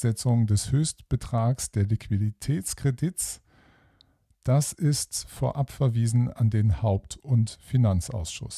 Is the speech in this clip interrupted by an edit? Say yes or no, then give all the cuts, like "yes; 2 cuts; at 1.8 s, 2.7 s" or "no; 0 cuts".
no; 0 cuts